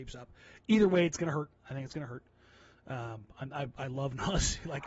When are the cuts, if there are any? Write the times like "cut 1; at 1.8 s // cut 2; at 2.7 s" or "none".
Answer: cut 1; at 1.6 s